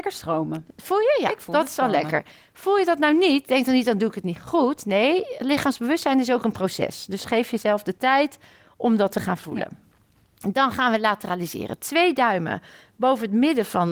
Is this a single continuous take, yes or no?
yes